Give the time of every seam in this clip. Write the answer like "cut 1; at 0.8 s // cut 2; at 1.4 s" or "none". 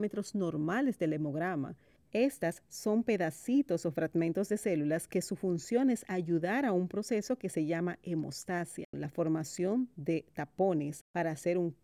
cut 1; at 2.0 s // cut 2; at 8.9 s